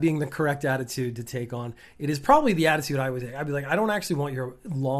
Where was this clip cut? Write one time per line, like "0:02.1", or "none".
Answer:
none